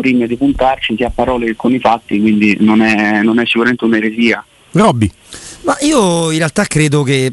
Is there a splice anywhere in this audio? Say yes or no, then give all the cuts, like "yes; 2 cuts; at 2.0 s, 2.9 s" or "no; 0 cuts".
no; 0 cuts